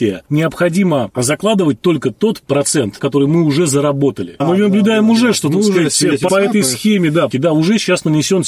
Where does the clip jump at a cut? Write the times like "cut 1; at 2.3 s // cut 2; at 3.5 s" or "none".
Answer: cut 1; at 4.4 s // cut 2; at 6.3 s // cut 3; at 7.3 s